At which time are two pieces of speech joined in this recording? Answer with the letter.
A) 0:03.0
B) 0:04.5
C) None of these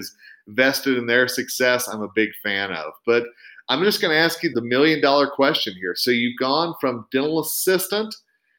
B